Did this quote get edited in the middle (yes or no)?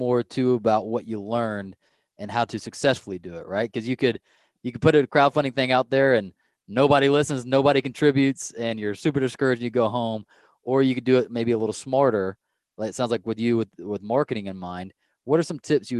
no